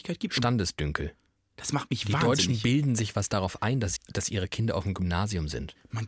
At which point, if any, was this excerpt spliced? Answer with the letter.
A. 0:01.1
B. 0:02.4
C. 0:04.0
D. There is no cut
C